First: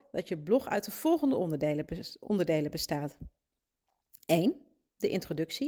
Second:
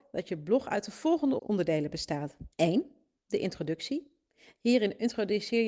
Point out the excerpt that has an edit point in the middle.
second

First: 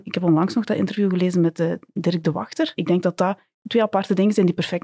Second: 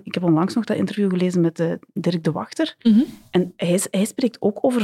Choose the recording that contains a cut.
first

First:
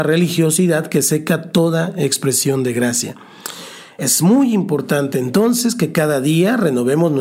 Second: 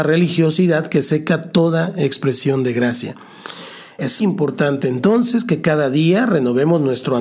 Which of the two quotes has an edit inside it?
second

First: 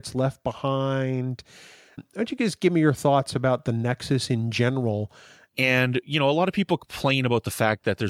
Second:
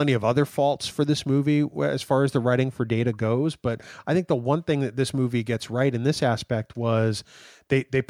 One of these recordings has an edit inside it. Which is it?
first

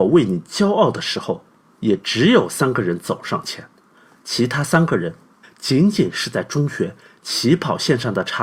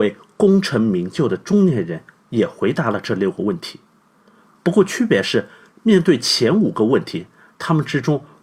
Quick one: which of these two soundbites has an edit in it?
first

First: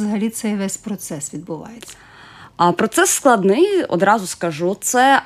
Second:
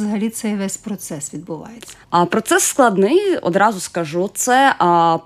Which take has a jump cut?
second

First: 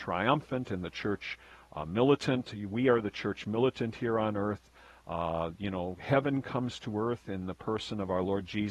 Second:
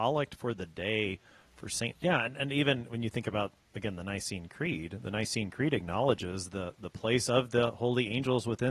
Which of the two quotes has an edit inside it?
second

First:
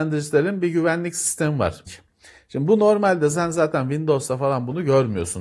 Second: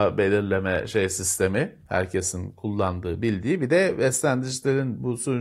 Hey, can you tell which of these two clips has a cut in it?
first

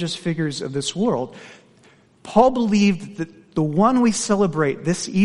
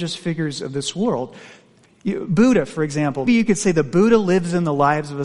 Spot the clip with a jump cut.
second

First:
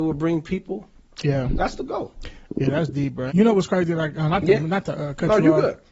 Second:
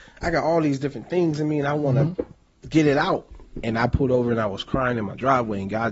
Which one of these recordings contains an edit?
first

